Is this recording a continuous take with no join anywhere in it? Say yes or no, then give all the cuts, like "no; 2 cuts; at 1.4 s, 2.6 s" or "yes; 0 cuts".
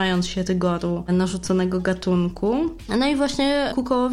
yes; 0 cuts